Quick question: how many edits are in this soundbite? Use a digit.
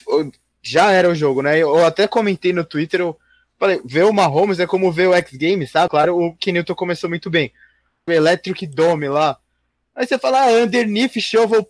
2